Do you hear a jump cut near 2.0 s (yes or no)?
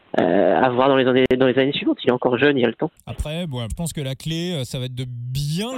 no